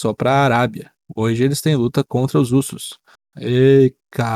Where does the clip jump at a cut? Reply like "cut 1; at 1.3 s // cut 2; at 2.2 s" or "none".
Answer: cut 1; at 3.3 s